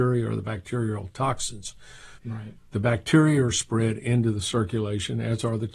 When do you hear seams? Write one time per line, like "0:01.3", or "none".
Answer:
0:02.2